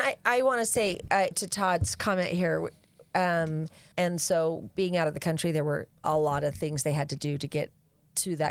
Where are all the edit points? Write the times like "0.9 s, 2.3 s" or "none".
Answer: 1.3 s, 3.9 s, 6.0 s